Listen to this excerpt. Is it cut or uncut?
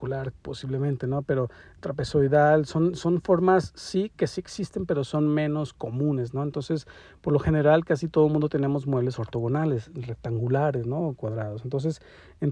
uncut